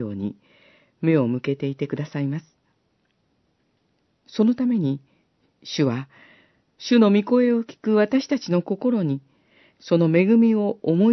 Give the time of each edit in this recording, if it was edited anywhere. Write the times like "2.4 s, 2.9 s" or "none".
none